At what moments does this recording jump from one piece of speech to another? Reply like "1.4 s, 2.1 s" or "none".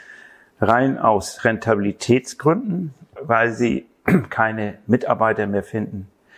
3.2 s